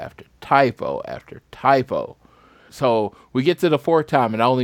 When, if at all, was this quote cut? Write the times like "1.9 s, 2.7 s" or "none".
2.7 s